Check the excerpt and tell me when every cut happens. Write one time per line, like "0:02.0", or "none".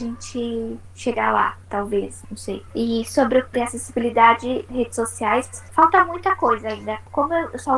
0:02.7